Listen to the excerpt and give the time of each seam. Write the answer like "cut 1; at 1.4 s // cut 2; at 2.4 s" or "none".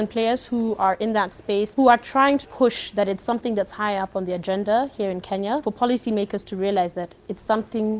cut 1; at 2.5 s